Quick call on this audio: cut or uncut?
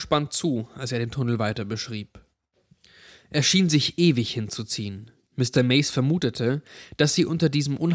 uncut